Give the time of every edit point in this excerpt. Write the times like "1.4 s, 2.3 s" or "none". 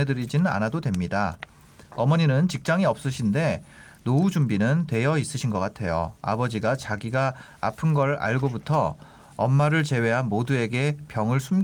none